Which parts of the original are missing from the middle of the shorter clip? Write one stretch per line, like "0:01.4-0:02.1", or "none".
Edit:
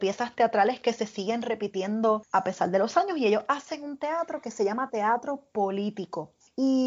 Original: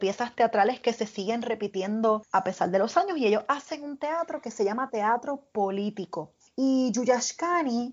none